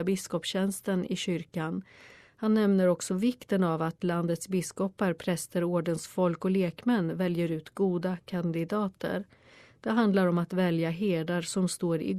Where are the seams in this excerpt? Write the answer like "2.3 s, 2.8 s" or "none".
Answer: none